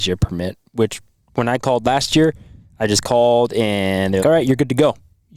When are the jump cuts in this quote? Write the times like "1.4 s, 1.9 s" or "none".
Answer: 4.2 s